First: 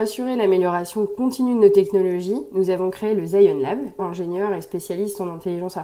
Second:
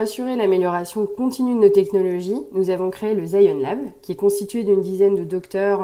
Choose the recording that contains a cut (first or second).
first